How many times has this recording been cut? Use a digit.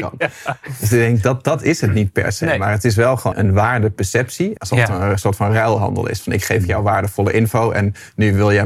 2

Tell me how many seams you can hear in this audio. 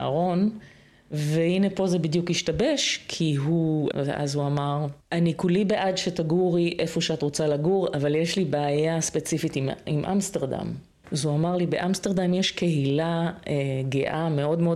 3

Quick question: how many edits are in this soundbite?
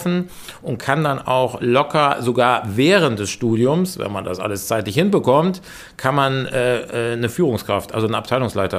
0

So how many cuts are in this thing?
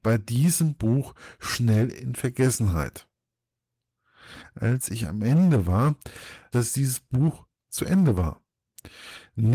1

